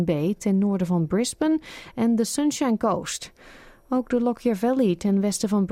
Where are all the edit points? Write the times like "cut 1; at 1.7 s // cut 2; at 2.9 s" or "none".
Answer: none